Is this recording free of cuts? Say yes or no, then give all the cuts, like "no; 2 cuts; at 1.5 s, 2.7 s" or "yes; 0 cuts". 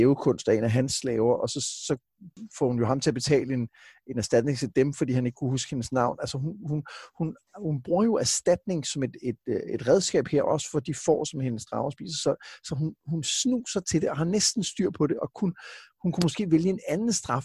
yes; 0 cuts